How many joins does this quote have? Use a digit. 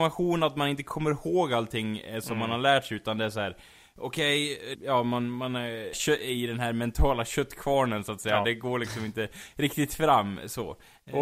2